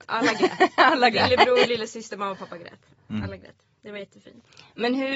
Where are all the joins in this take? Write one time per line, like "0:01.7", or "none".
none